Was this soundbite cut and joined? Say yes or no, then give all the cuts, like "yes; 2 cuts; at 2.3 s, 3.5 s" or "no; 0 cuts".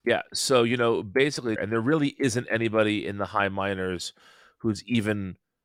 yes; 1 cut; at 1.6 s